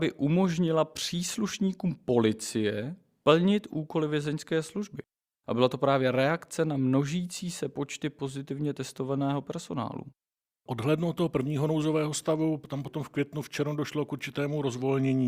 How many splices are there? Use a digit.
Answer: 0